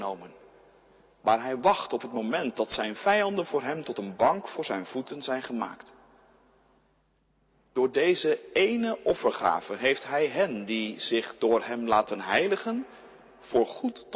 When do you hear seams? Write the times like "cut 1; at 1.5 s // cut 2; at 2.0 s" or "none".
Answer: none